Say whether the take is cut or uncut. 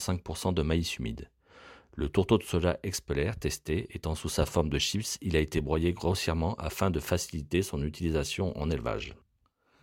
uncut